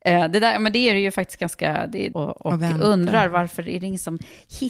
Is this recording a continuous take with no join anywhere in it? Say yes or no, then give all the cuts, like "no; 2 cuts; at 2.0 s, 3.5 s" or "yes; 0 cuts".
no; 1 cut; at 2.1 s